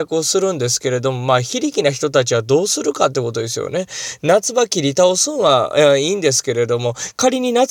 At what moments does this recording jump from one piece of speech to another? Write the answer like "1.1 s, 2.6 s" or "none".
none